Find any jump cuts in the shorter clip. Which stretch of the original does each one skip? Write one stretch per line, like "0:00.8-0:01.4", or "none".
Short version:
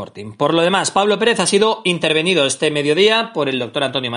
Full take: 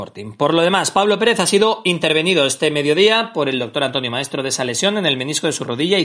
none